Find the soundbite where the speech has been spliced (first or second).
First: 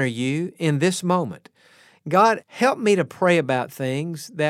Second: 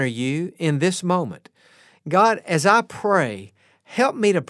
first